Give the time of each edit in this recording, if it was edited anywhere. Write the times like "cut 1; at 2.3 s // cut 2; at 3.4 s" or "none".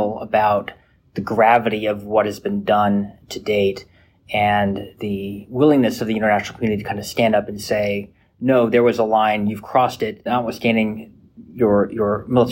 cut 1; at 10.3 s

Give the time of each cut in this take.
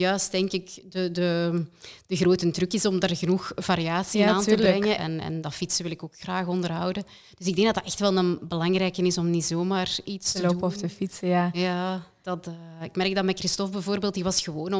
cut 1; at 5.0 s

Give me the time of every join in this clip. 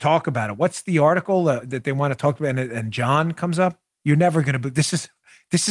cut 1; at 1.6 s

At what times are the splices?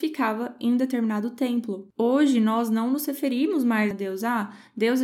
cut 1; at 3.9 s

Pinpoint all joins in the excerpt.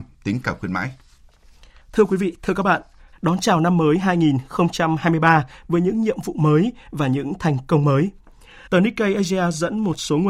cut 1; at 1.8 s // cut 2; at 3.1 s // cut 3; at 8.7 s

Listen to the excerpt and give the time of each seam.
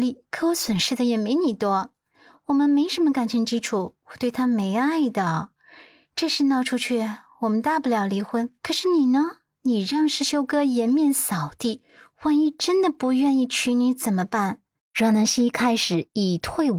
cut 1; at 2.1 s // cut 2; at 8.6 s // cut 3; at 14.8 s

